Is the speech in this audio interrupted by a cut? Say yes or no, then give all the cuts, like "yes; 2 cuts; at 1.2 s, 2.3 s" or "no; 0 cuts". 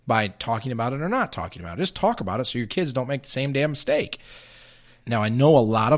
yes; 1 cut; at 5.0 s